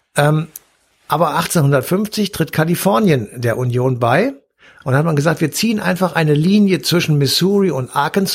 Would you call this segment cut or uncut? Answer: cut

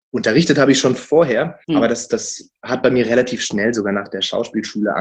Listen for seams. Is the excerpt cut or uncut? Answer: cut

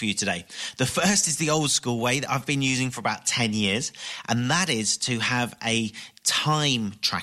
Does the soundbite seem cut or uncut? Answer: uncut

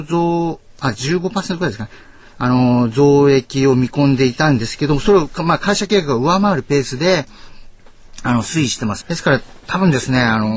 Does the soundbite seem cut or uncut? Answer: cut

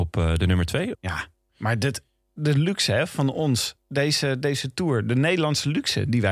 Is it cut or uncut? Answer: cut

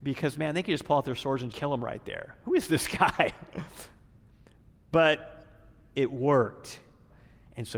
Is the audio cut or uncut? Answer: cut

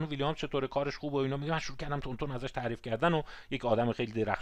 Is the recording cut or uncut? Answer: uncut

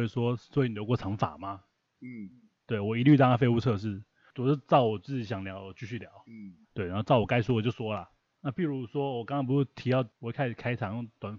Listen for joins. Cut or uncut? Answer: cut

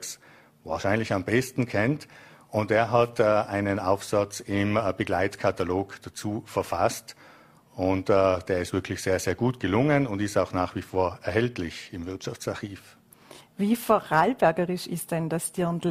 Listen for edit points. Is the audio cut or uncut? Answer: uncut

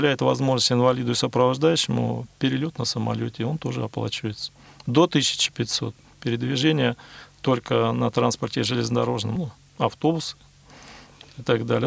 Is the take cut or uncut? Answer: uncut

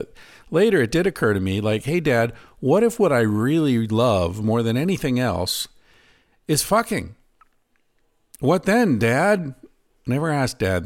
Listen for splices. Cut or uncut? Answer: uncut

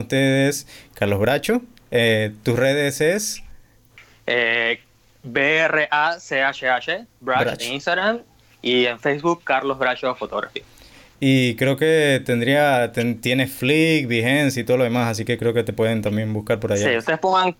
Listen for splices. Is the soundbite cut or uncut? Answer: uncut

